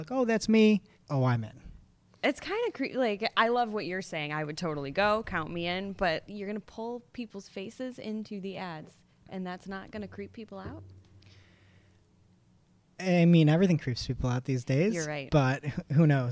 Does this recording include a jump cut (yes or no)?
yes